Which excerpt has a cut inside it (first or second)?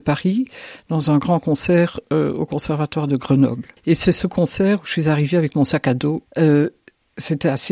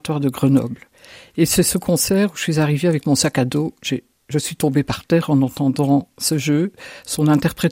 first